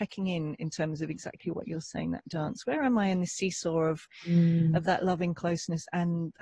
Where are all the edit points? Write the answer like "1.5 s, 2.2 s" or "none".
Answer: none

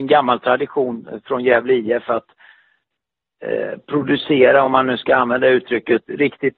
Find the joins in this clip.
none

